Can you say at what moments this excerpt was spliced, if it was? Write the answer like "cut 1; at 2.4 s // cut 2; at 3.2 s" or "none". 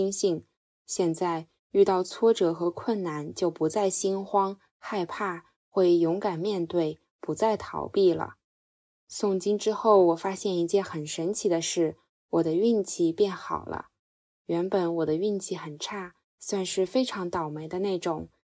none